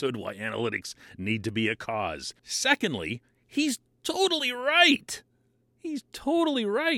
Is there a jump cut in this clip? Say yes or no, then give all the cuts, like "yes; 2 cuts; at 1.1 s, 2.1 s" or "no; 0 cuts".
yes; 1 cut; at 2.4 s